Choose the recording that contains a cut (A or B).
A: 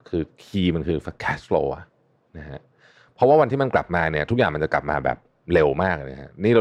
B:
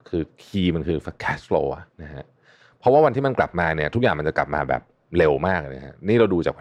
B